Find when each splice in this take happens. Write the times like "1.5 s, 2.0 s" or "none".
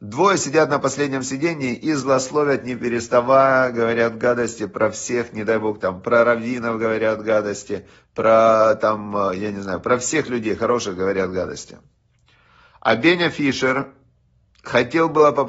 none